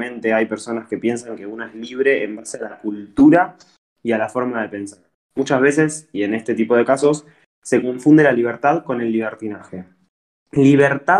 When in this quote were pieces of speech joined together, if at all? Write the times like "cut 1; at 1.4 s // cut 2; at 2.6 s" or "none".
none